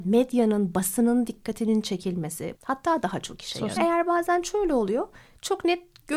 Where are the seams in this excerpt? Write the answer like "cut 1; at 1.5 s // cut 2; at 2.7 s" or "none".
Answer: cut 1; at 2.6 s // cut 2; at 3.8 s